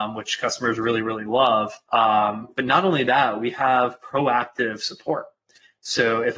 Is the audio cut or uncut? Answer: cut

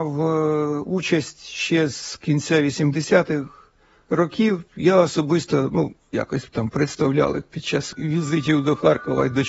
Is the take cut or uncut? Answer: cut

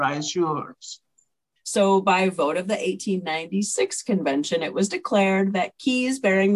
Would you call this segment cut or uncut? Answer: cut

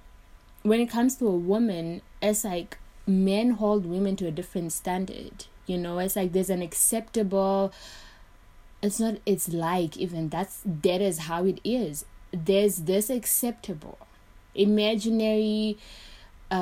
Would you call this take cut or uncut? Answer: uncut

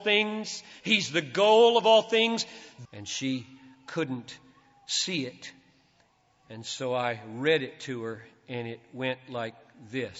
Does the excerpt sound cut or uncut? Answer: cut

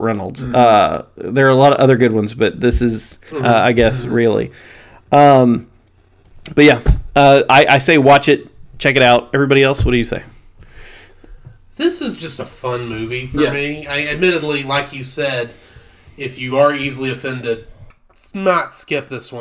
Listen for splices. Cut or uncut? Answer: cut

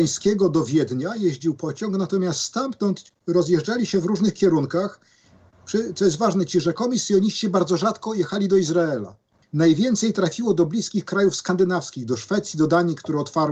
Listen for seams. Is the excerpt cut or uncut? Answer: cut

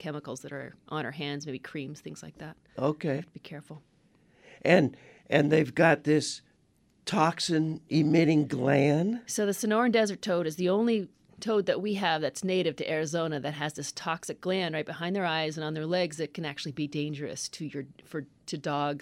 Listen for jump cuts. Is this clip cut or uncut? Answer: uncut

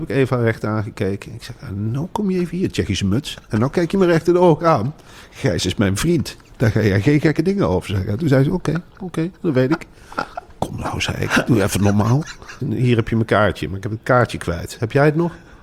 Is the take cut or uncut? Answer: cut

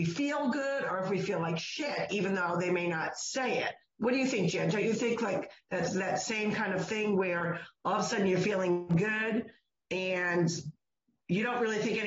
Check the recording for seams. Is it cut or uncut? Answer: uncut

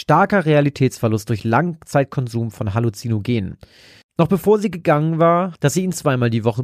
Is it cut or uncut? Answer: cut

